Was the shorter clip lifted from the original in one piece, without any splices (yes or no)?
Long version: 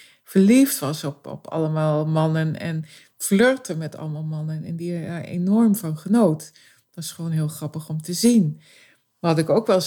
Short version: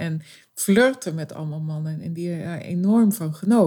yes